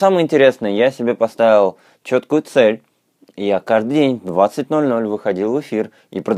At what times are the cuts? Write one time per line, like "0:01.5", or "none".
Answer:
none